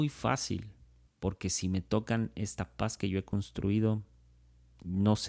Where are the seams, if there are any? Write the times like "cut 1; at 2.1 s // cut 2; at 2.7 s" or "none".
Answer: cut 1; at 1.1 s